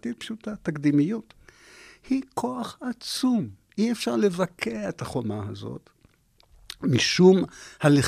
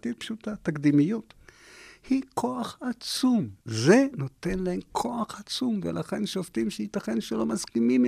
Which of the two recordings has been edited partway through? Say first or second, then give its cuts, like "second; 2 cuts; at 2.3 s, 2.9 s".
second; 1 cut; at 3.6 s